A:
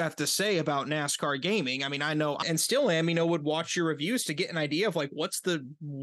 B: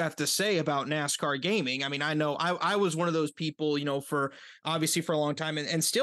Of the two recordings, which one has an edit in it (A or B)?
A